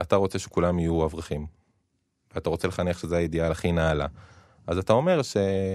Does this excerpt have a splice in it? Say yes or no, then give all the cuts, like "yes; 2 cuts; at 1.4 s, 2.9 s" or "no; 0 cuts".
no; 0 cuts